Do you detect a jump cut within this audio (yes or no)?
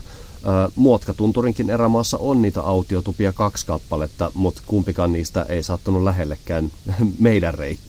no